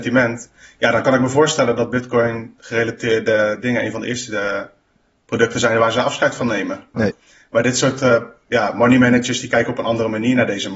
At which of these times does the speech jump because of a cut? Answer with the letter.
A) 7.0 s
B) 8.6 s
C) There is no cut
A